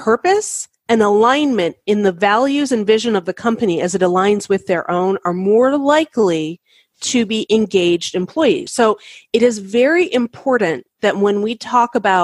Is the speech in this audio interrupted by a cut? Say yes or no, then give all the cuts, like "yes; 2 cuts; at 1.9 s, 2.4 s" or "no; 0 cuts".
yes; 1 cut; at 8.7 s